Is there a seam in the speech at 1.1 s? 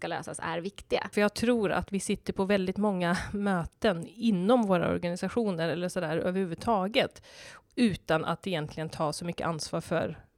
yes; 1 cut; at 1.1 s

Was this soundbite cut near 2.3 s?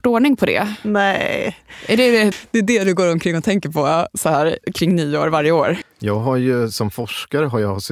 yes; 2 cuts; at 2.3 s, 5.8 s

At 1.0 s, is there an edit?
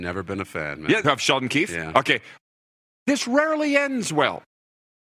yes; 1 cut; at 1.0 s

